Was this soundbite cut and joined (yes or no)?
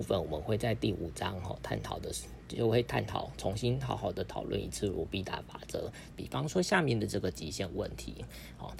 yes